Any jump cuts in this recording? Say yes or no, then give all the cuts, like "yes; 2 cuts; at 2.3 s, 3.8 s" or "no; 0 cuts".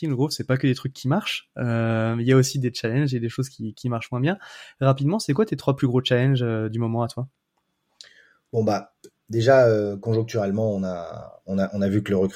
no; 0 cuts